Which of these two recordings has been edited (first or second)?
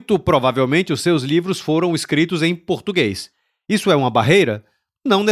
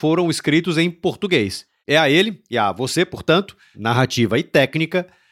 second